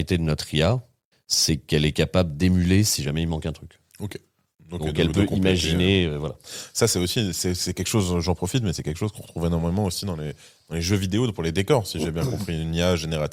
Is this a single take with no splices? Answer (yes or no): no